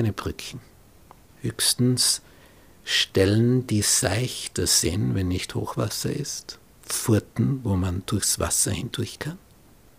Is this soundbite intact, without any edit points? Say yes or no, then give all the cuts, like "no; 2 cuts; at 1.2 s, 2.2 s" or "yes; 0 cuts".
yes; 0 cuts